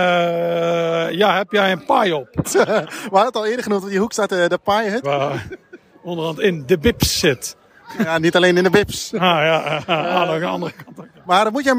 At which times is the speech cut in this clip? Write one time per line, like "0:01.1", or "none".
0:02.4
0:05.0